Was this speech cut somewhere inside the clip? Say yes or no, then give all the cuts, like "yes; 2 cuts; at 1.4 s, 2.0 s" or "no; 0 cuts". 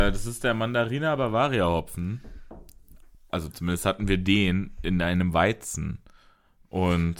no; 0 cuts